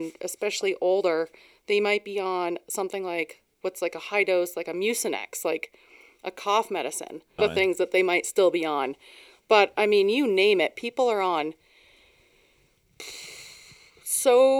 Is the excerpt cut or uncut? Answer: cut